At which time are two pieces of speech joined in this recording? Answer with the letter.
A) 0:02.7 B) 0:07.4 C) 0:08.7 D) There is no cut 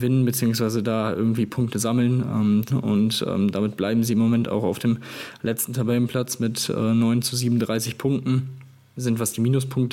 A